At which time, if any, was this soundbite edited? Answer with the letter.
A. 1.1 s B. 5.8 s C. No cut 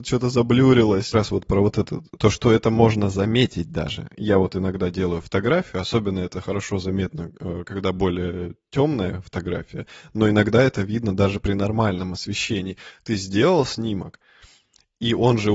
A